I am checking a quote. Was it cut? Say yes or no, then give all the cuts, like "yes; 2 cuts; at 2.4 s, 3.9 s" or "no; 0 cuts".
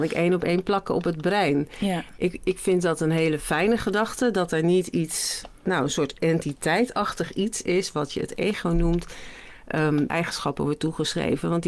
yes; 1 cut; at 10.1 s